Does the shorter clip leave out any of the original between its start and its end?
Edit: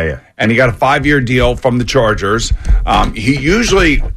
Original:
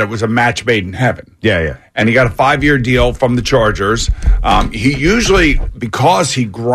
no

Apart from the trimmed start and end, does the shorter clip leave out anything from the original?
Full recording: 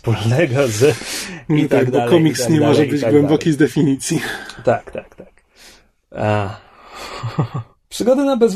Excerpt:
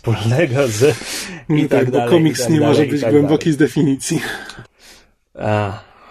yes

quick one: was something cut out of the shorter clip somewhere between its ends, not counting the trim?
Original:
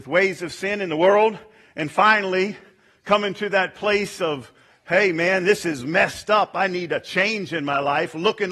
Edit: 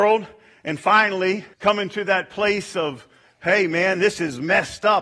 yes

